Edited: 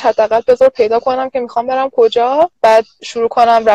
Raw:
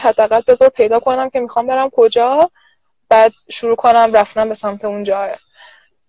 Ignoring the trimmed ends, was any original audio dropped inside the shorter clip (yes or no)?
yes